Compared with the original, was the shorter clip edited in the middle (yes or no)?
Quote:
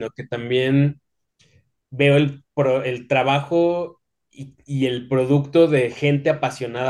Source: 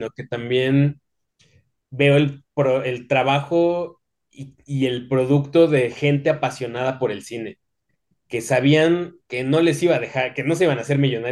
no